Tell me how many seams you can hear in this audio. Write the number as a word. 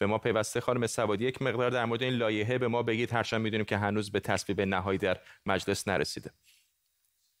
zero